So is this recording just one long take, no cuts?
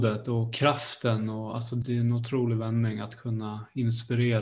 no; 1 cut; at 1.8 s

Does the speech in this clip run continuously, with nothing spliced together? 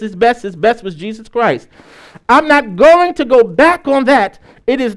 yes; 0 cuts

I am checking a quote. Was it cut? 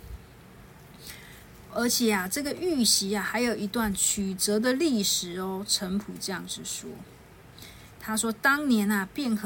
no; 0 cuts

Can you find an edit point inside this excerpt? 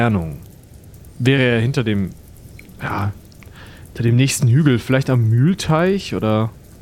no; 0 cuts

